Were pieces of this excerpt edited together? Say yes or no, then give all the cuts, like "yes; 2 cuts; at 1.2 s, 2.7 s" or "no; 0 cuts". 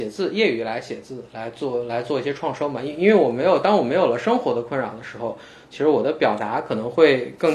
no; 0 cuts